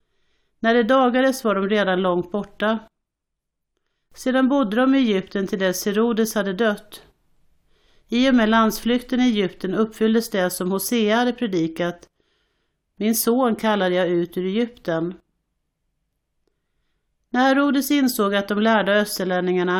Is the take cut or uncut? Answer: uncut